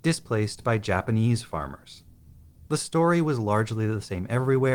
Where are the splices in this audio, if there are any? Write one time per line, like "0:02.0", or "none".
0:02.7